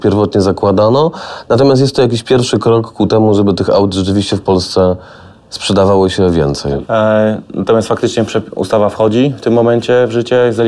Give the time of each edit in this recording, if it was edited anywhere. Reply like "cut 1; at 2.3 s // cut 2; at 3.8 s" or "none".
cut 1; at 6.8 s